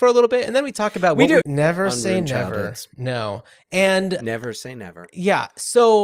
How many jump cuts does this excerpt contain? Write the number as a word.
one